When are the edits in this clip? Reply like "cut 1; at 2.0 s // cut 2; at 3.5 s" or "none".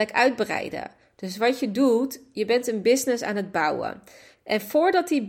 none